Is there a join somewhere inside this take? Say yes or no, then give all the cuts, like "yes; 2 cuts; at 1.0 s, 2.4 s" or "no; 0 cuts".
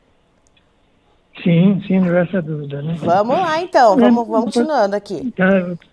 yes; 1 cut; at 4.5 s